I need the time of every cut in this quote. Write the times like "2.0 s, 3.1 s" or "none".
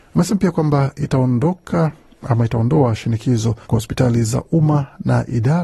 3.6 s